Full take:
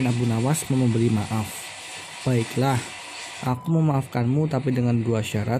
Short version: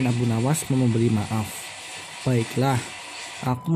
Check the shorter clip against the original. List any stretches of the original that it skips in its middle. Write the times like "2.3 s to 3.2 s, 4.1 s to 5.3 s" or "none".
none